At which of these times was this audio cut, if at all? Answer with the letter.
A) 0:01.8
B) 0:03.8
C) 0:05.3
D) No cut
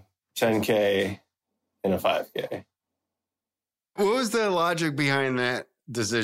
D